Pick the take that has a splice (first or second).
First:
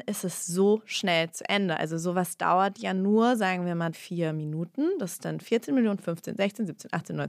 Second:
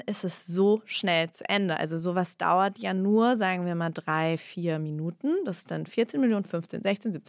first